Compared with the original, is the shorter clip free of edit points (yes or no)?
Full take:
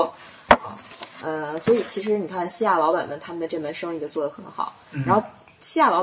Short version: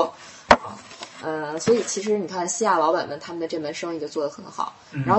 yes